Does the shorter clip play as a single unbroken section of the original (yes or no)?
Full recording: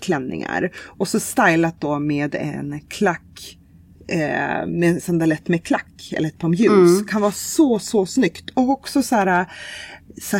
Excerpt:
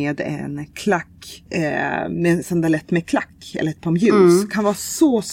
no